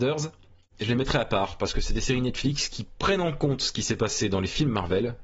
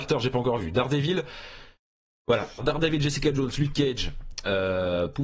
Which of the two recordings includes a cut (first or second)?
second